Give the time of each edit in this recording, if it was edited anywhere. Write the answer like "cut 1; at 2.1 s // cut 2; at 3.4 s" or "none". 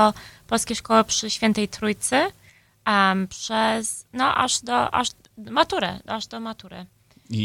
none